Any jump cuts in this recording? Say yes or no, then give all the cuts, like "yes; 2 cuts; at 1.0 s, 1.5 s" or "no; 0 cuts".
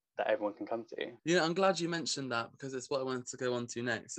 yes; 1 cut; at 1.2 s